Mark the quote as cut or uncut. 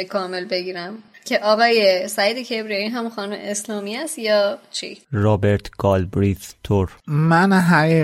cut